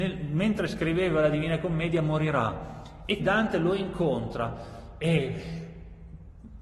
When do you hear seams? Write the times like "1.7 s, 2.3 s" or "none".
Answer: 3.2 s